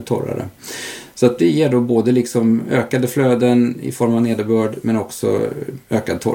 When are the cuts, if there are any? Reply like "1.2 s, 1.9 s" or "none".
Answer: 1.4 s